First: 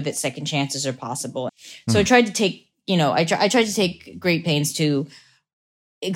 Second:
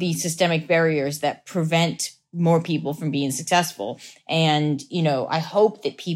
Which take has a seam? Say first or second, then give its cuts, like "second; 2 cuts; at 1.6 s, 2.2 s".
first; 1 cut; at 1.5 s